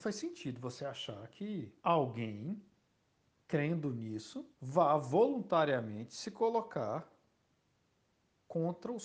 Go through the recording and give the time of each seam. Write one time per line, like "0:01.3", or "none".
0:01.8
0:04.5